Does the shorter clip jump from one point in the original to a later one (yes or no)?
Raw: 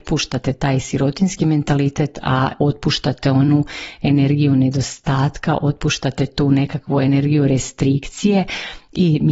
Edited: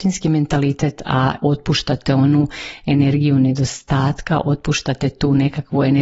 no